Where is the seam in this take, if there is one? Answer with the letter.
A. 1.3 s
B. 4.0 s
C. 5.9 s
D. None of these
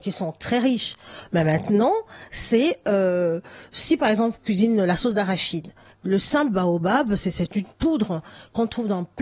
C